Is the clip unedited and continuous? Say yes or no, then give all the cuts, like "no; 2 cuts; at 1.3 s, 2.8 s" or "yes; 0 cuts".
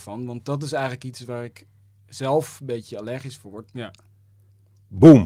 no; 1 cut; at 3.7 s